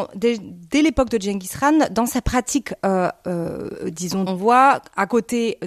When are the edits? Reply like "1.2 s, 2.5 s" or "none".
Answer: 4.3 s